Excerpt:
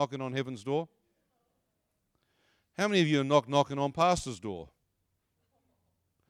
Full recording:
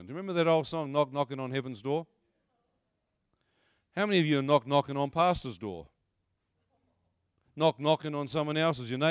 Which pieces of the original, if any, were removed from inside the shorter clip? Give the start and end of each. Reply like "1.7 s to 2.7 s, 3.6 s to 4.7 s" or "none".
none